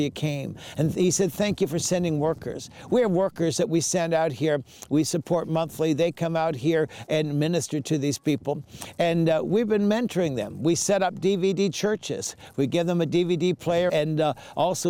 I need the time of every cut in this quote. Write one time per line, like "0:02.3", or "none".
0:13.9